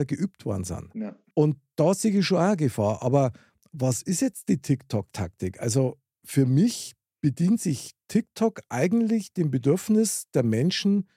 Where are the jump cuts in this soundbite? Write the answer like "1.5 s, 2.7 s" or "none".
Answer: none